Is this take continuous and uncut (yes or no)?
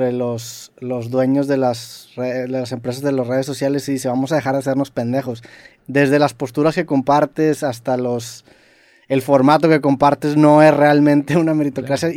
no